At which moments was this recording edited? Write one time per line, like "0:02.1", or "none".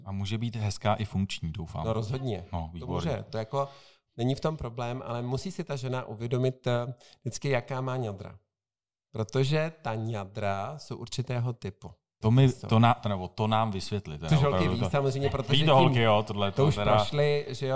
0:12.2